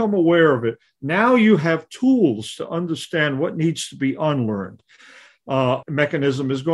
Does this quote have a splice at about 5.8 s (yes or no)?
yes